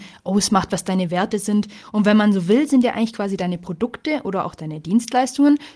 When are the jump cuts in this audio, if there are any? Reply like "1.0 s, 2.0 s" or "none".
none